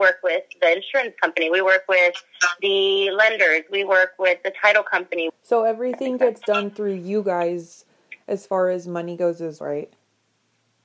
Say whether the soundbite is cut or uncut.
cut